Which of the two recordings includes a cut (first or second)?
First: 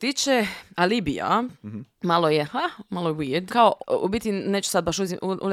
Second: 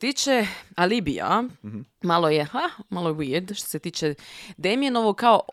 first